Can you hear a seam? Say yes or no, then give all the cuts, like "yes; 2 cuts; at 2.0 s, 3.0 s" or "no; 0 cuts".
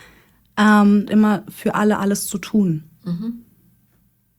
yes; 1 cut; at 1.1 s